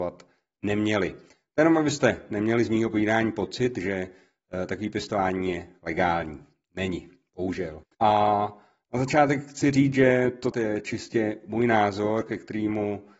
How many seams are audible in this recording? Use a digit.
2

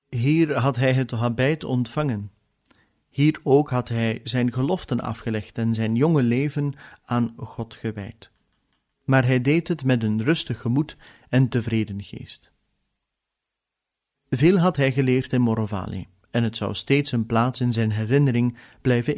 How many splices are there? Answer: 1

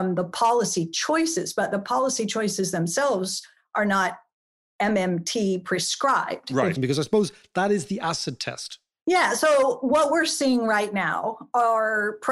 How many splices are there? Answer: 1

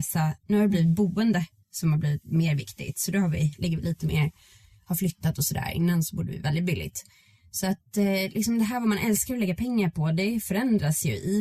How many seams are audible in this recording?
0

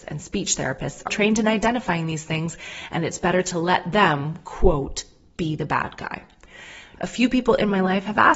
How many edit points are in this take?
2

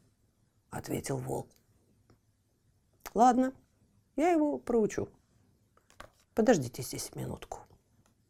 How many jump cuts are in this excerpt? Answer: 1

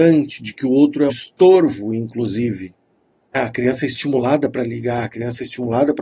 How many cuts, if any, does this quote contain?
2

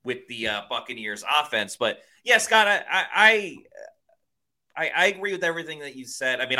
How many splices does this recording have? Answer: 0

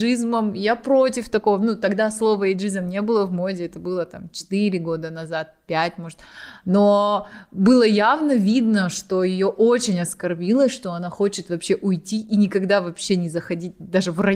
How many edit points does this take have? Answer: 0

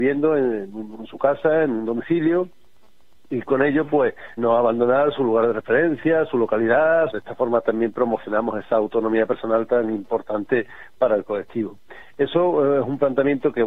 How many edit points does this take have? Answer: 2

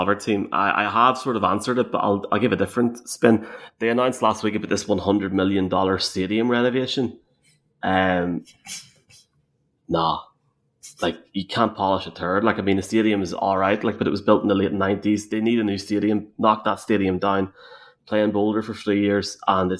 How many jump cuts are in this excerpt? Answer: 0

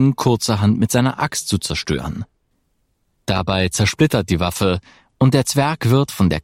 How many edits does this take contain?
0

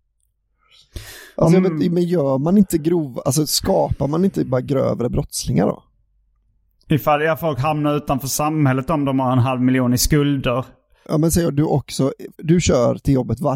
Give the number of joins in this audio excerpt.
2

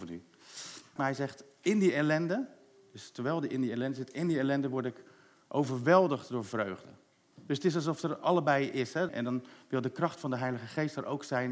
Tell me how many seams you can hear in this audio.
2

